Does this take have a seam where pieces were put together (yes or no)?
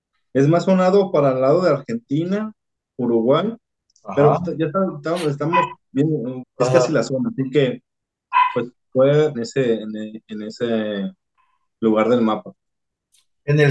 yes